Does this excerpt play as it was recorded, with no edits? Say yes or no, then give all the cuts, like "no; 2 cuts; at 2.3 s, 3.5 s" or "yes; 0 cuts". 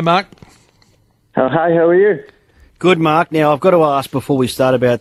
yes; 0 cuts